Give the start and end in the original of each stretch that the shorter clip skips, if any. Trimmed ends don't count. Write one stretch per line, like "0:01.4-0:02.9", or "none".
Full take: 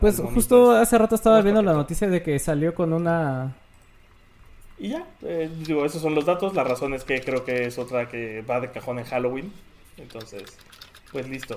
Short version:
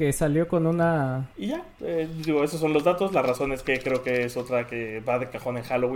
0:03.6-0:04.7